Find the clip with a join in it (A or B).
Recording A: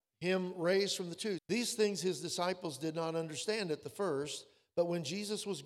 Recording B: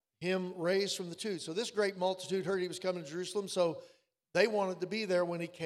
A